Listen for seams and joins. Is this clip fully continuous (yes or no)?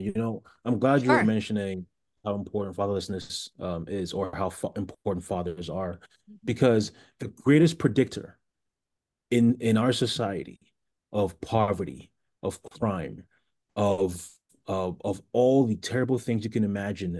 yes